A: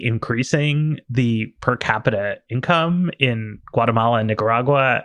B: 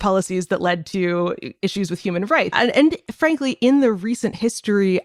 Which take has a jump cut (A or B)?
B